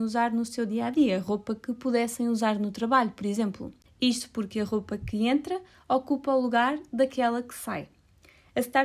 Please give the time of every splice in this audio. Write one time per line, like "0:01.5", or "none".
0:03.9